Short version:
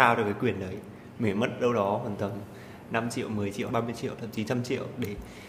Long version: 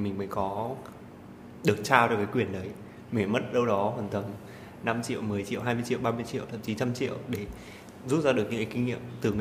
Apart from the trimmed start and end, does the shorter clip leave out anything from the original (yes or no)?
yes